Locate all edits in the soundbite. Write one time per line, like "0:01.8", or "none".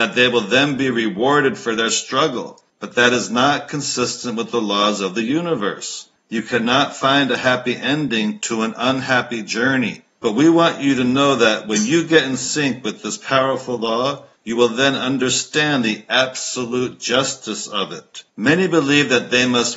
0:10.1
0:18.3

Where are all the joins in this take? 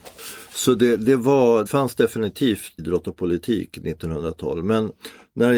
0:01.7
0:02.8

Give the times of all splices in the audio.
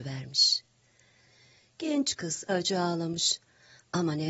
0:02.5

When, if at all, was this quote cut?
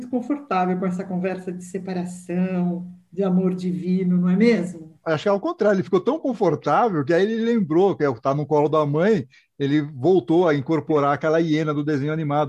0:05.0

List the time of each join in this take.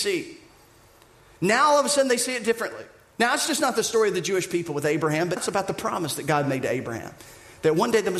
0:05.4

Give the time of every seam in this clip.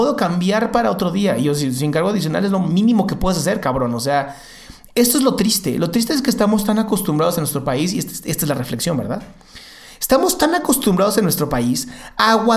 none

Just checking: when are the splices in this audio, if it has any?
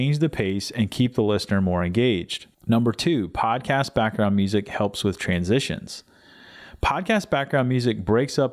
0:02.5

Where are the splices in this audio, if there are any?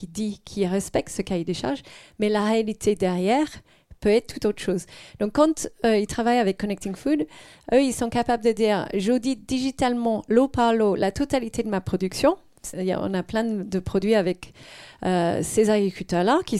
0:12.7

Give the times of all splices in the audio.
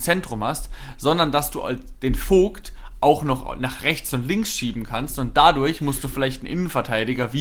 none

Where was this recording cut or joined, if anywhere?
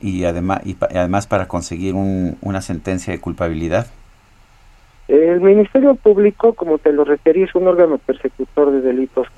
0:05.0

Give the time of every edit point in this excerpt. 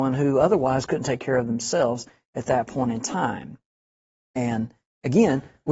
none

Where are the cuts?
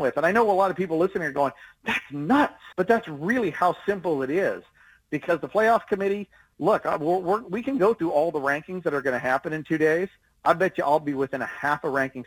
0:02.7

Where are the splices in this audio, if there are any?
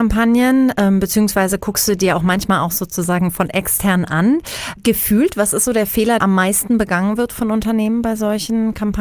0:06.2

